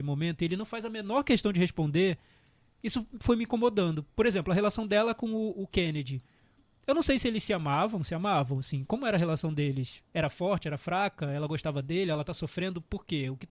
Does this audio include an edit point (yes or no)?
no